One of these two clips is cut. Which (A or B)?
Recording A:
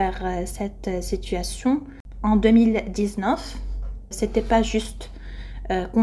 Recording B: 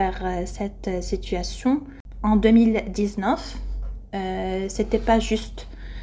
A